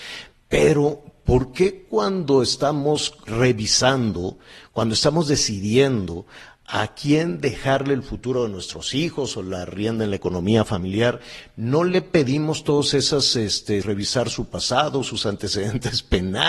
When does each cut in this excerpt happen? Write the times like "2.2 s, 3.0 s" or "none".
3.3 s, 13.8 s